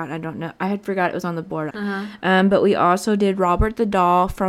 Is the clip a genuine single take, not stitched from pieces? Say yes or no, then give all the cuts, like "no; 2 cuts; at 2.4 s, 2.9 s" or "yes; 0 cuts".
no; 1 cut; at 1.7 s